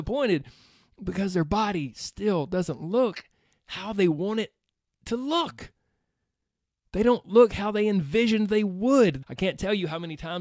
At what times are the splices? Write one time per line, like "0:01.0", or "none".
0:09.2